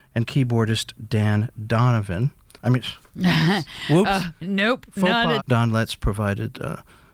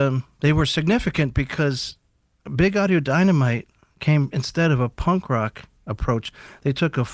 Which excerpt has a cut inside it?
first; 2 cuts; at 2.6 s, 5.4 s

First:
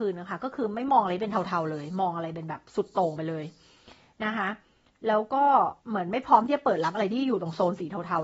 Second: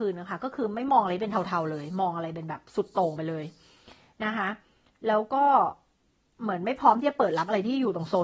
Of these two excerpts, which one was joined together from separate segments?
first; 1 cut; at 5.8 s

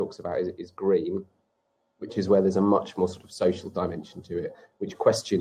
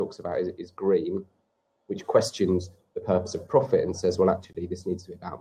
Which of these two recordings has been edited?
second; 1 cut; at 1.9 s

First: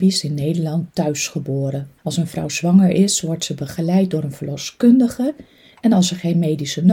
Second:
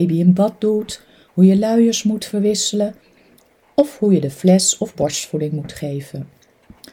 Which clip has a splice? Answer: first; 1 cut; at 2.0 s

